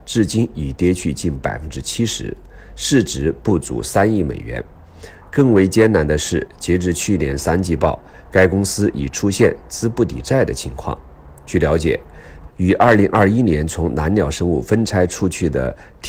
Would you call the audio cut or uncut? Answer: cut